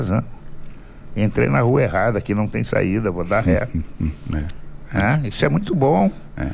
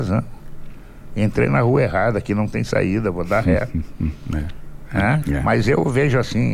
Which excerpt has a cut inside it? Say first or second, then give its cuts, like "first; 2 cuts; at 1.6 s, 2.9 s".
second; 1 cut; at 5.2 s